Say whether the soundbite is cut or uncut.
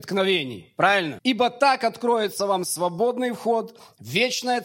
cut